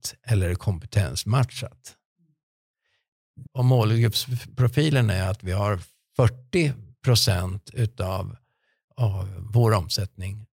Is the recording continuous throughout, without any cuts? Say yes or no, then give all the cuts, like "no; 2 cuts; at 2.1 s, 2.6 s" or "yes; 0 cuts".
no; 1 cut; at 3.4 s